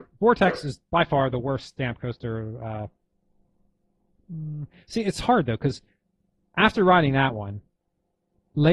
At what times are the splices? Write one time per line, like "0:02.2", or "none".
none